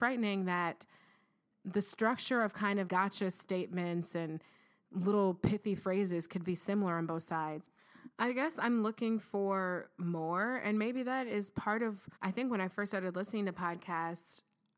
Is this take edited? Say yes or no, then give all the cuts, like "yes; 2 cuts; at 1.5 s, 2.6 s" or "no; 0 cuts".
yes; 2 cuts; at 2.9 s, 12.2 s